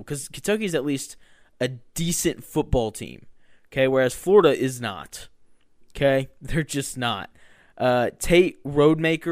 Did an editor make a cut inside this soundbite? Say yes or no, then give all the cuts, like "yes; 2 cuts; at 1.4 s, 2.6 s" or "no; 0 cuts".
no; 0 cuts